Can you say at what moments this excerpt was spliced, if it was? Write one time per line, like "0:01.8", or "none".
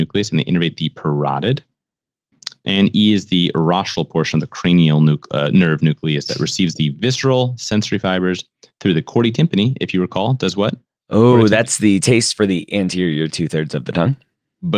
none